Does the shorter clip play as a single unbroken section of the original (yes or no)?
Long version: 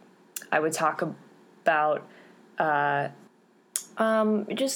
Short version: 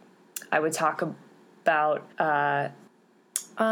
no